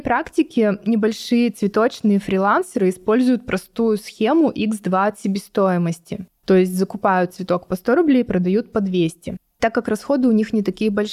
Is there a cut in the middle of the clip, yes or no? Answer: no